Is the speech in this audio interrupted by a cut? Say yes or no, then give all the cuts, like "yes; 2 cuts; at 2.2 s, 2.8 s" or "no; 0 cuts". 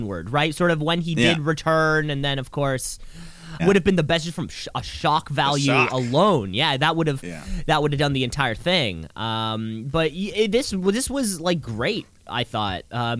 yes; 1 cut; at 3.6 s